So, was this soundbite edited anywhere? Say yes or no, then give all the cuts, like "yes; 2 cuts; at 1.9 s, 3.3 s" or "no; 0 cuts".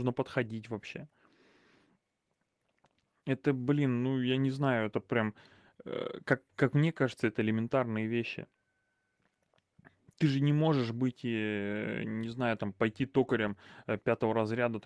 no; 0 cuts